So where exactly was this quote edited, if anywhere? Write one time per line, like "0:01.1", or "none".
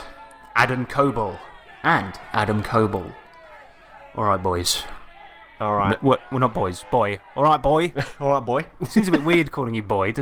none